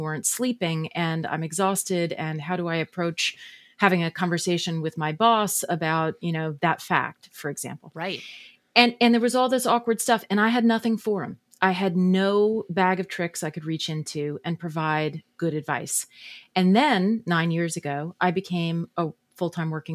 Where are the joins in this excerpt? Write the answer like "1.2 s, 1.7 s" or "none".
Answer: none